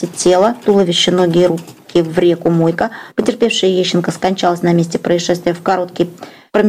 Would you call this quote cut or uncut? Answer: cut